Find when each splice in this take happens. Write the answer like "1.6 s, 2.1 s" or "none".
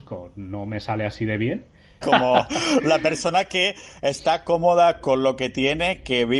2.0 s